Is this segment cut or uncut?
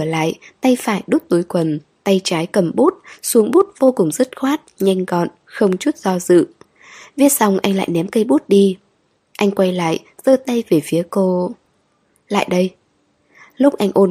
uncut